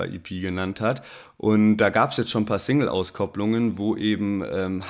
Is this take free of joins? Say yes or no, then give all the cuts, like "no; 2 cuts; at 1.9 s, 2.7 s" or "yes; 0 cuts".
yes; 0 cuts